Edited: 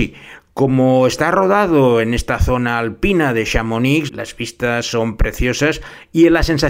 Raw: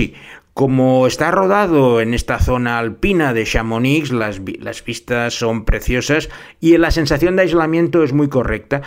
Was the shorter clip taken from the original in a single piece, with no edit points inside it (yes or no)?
no